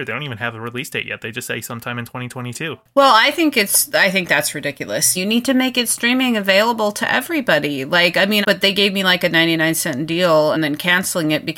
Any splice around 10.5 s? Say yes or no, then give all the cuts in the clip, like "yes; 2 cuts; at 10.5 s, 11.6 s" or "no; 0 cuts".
yes; 3 cuts; at 5.2 s, 8.4 s, 10.5 s